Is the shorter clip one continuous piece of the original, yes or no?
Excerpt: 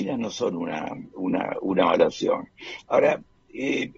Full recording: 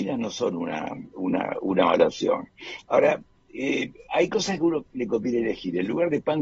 yes